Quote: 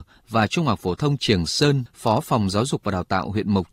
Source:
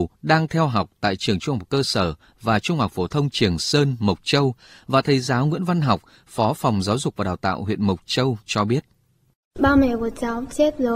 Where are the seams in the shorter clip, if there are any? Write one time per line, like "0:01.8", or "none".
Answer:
0:01.9